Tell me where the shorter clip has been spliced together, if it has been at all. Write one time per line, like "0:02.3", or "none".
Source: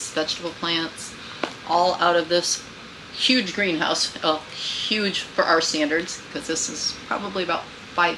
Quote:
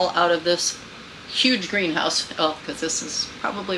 0:02.6